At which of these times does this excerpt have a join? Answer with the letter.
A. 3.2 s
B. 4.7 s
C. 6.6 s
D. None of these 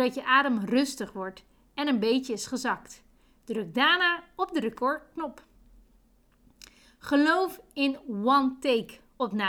D